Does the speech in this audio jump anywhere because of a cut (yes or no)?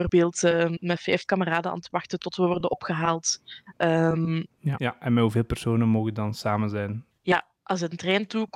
yes